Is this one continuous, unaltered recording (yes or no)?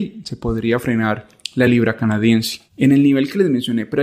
no